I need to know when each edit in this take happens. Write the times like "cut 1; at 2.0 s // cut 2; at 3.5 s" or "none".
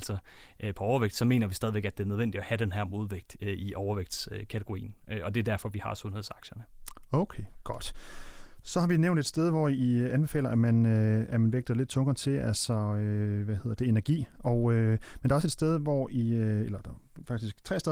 none